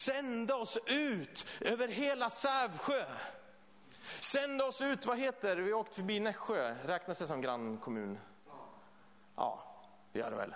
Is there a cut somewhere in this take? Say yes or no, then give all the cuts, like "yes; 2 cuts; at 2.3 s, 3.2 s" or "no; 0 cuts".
no; 0 cuts